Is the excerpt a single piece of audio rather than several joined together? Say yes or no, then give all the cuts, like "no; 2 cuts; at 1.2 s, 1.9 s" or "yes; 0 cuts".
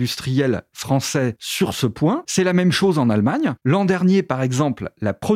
no; 1 cut; at 3.6 s